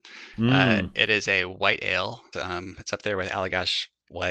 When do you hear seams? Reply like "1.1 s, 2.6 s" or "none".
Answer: 2.3 s